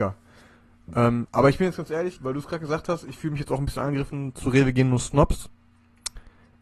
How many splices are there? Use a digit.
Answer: 1